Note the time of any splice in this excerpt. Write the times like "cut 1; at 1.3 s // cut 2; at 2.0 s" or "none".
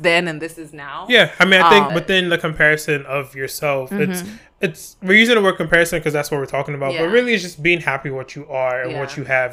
cut 1; at 1.9 s